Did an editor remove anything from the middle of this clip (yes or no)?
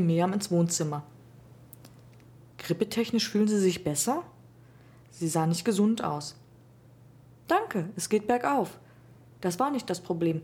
no